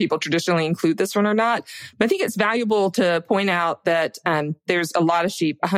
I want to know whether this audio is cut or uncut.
uncut